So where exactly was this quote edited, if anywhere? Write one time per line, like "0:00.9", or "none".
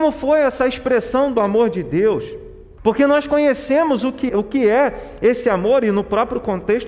0:02.8
0:04.3